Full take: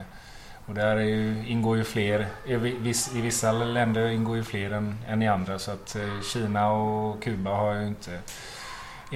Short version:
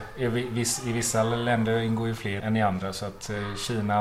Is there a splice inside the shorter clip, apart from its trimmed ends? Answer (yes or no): yes